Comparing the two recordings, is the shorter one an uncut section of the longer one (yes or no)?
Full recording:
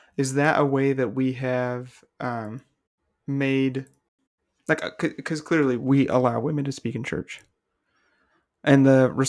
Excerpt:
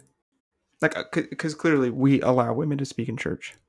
yes